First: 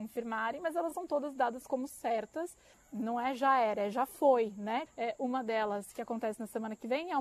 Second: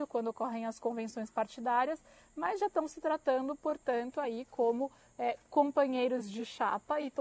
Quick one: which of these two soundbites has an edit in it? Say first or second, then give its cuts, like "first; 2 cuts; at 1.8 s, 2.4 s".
first; 2 cuts; at 2.7 s, 4.9 s